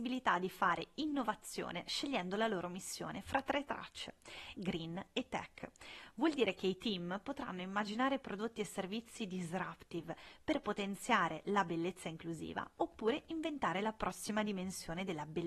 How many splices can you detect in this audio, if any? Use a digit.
1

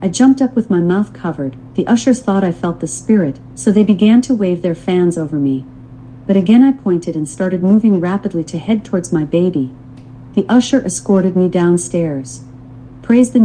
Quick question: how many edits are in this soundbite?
0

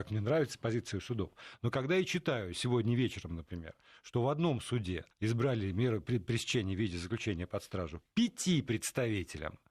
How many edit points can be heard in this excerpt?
1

